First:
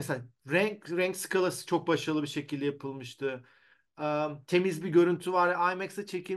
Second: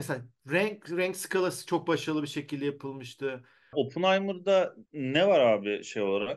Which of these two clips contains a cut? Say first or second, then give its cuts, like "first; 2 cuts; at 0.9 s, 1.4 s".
second; 2 cuts; at 3.7 s, 4.9 s